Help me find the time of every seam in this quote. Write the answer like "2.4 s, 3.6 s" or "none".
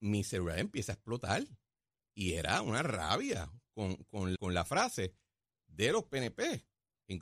4.3 s